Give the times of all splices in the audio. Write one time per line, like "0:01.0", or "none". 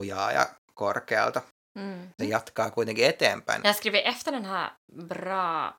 0:02.2
0:03.6